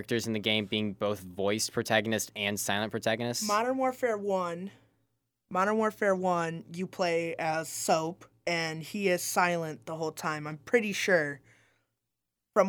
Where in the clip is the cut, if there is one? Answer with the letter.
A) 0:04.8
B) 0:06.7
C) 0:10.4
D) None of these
D